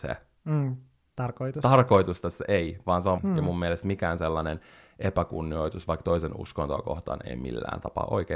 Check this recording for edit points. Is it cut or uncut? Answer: cut